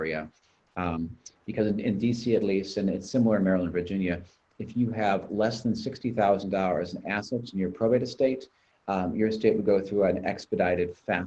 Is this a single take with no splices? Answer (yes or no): yes